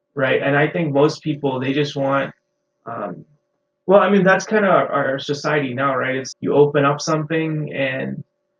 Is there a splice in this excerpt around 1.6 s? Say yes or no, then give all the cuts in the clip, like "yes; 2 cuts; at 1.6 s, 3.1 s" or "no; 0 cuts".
no; 1 cut; at 6.3 s